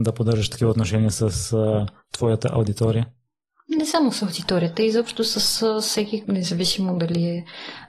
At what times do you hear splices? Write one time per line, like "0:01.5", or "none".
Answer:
0:06.2